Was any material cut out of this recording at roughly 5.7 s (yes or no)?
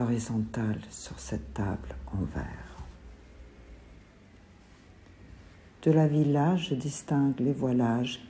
yes